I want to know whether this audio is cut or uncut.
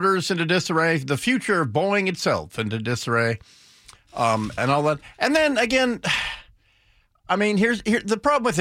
cut